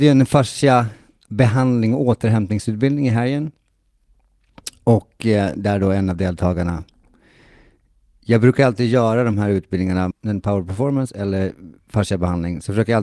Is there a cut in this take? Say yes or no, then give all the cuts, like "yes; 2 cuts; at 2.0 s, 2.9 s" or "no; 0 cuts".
yes; 1 cut; at 10.1 s